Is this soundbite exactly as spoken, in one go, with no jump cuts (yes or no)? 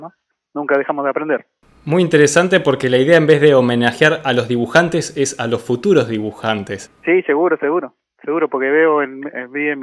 no